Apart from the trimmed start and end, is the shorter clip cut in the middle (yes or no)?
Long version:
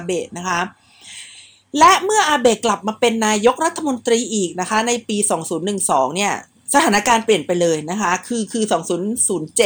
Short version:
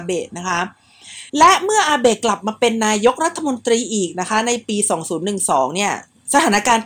yes